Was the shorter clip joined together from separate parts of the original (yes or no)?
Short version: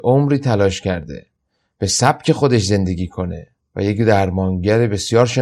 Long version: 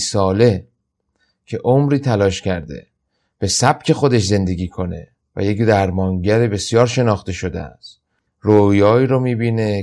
no